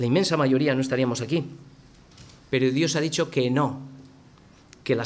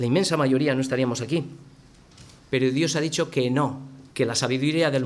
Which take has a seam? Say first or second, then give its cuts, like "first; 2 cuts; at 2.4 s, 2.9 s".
second; 1 cut; at 4.1 s